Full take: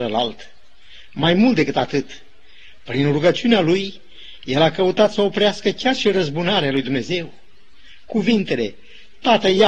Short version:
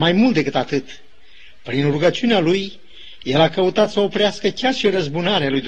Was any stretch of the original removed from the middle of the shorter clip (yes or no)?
no